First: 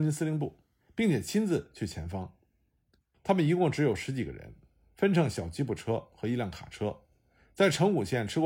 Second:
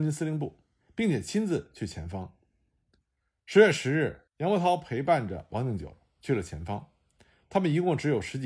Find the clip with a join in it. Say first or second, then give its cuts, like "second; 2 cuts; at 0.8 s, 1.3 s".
first; 1 cut; at 3.1 s